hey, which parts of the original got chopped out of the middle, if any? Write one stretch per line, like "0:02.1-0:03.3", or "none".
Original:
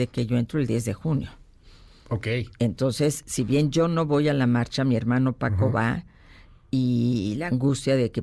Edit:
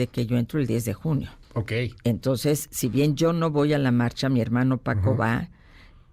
0:01.4-0:02.0

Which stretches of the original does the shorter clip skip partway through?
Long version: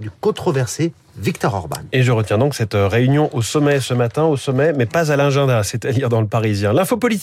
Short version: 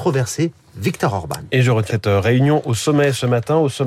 0:02.3-0:02.6

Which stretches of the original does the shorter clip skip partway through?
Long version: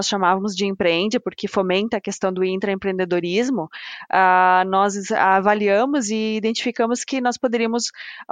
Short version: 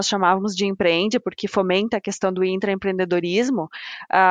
none

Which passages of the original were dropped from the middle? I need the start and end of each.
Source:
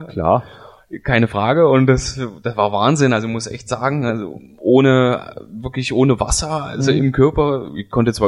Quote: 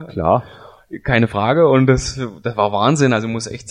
none

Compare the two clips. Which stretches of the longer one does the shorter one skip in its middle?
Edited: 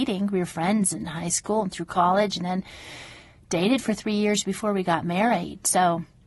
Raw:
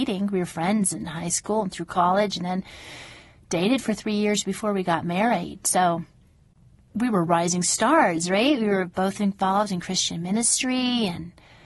none

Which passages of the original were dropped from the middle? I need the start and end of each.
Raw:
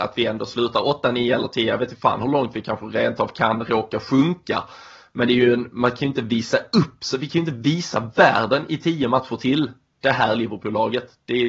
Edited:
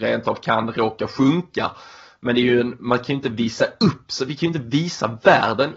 none

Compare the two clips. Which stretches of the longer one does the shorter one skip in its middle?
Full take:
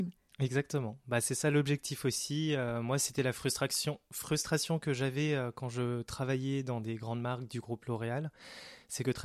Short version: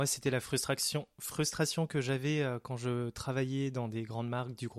none

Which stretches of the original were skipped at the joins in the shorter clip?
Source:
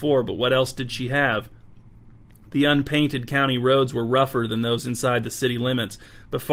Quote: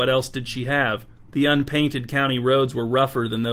0:01.7-0:02.5

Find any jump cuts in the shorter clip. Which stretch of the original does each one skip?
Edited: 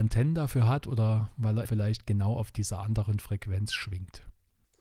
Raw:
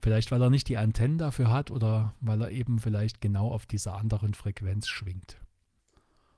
0:02.5-0:02.8

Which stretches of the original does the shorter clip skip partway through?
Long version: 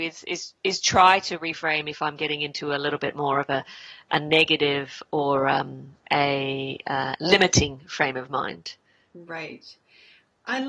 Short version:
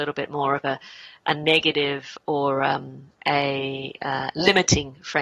none

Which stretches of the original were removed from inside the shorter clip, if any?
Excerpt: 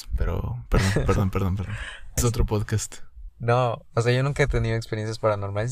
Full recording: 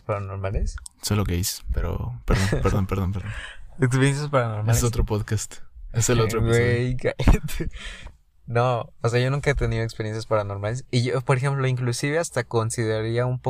0:03.7-0:04.8
0:05.9-0:08.4

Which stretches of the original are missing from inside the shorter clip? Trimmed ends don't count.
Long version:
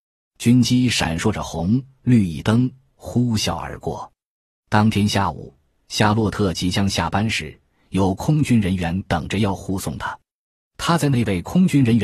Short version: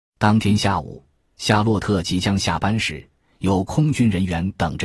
none

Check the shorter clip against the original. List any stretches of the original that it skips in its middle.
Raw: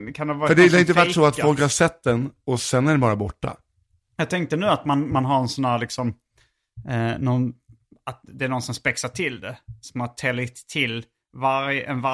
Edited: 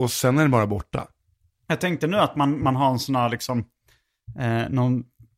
none

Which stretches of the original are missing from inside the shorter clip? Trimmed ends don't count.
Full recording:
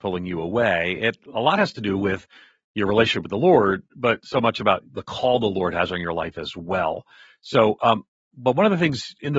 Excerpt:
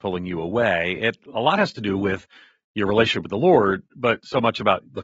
none

